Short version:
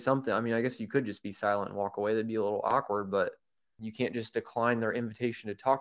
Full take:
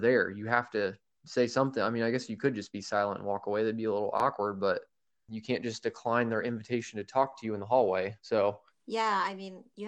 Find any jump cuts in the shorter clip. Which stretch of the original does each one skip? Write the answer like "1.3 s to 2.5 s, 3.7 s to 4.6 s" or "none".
none